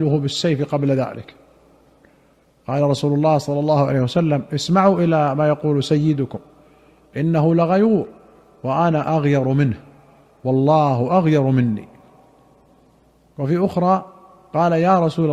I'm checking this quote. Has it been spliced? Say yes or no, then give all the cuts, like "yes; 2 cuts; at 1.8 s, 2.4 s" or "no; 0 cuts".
no; 0 cuts